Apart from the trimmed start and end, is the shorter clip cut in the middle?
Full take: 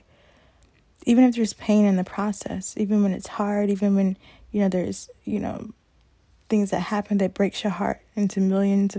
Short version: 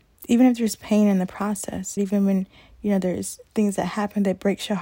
yes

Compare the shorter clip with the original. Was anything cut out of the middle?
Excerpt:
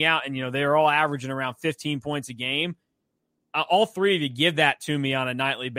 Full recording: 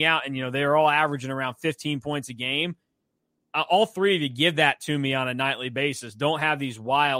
no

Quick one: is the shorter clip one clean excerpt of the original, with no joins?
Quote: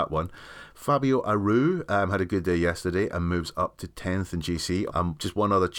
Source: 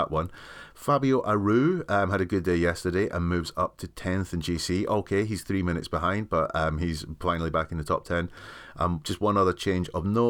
no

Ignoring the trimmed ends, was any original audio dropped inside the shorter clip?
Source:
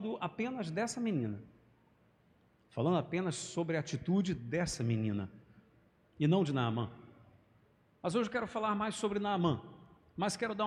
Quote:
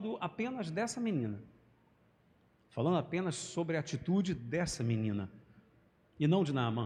no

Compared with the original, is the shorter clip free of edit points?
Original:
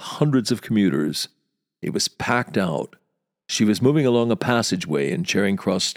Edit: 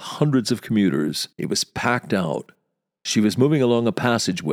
no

